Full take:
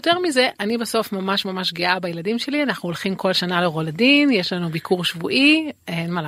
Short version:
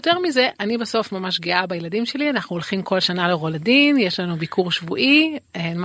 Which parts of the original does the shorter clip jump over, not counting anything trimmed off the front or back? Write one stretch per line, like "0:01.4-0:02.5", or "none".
0:01.1-0:01.4